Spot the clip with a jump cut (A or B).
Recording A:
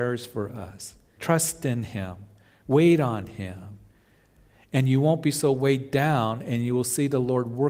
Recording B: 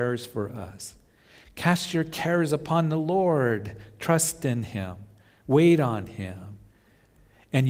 A